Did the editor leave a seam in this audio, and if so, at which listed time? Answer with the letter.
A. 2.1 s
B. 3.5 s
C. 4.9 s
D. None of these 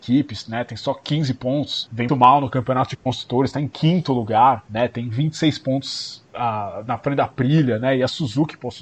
A